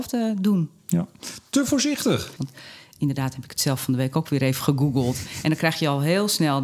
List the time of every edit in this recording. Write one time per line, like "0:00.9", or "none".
0:02.4